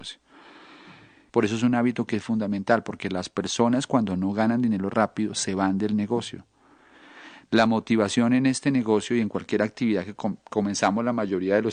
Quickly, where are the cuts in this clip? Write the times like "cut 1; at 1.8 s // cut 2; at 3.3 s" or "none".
cut 1; at 1.3 s